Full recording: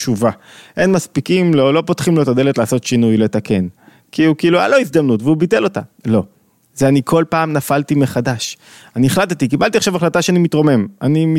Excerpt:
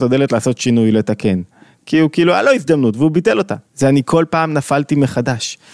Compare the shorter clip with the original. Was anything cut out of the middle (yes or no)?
yes